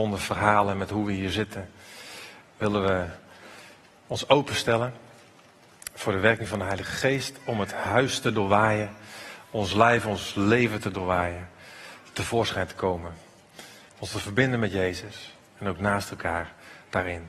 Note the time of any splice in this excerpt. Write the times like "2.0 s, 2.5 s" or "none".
2.4 s